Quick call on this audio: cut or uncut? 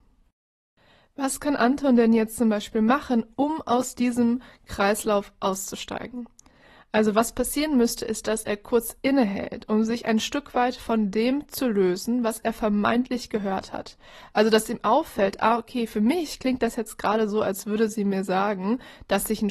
uncut